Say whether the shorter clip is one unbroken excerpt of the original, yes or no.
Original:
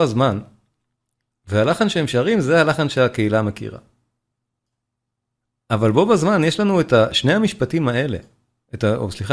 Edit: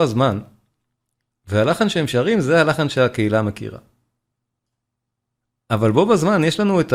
yes